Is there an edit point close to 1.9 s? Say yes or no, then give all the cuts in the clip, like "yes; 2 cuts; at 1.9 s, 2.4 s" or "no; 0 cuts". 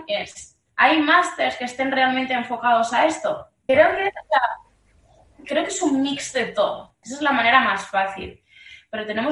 no; 2 cuts; at 3.7 s, 7.0 s